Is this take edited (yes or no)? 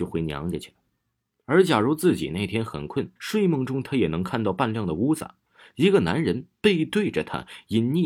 yes